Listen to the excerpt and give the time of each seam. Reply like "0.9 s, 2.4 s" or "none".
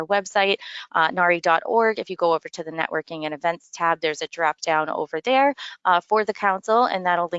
none

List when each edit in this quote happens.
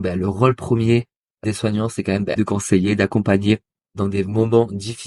2.4 s

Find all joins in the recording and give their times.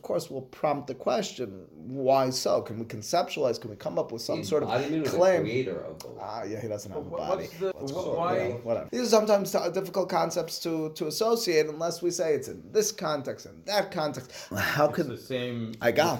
7.7 s, 8.9 s, 14.5 s

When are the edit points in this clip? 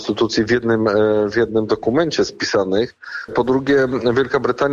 3.3 s

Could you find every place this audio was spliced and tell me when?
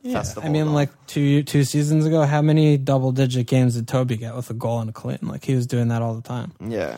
none

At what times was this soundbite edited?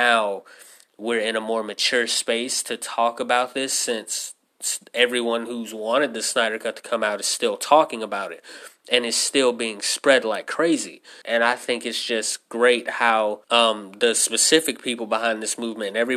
11.2 s, 13.4 s

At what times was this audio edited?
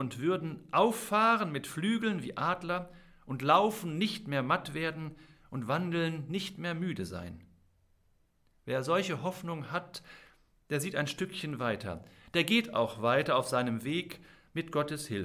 none

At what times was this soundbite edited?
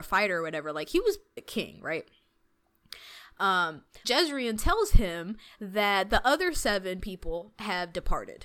1.4 s, 4.0 s

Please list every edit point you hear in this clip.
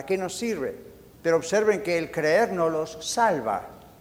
1.2 s

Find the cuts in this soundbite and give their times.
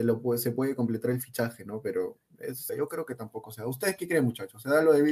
2.7 s

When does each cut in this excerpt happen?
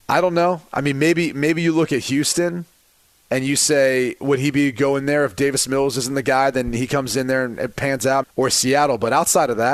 8.2 s

